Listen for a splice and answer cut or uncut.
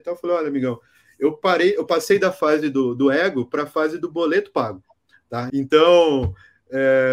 cut